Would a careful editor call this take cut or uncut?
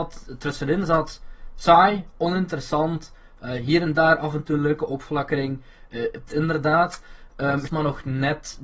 cut